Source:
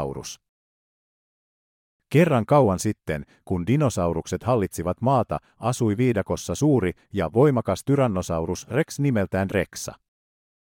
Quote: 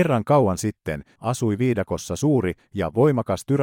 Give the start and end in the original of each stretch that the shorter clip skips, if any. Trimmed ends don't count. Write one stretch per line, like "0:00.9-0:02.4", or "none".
0:03.4-0:05.5